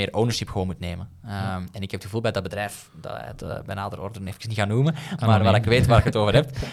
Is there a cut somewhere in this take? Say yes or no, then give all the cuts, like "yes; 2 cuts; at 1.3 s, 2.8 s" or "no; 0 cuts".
no; 0 cuts